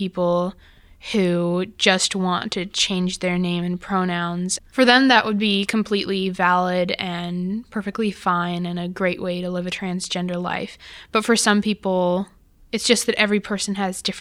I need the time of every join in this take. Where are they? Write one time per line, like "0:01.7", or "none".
0:04.6